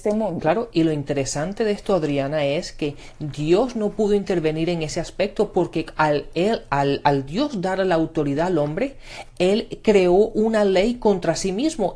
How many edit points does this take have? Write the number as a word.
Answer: zero